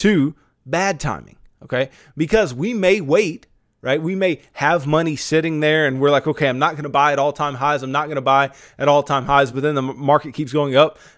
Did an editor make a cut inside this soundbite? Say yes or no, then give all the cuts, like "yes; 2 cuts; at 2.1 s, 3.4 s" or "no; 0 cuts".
no; 0 cuts